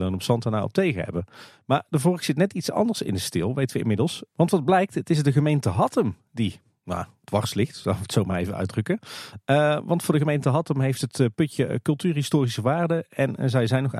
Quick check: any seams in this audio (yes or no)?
no